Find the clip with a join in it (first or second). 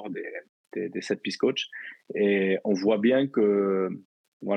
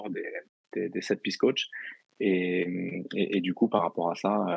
second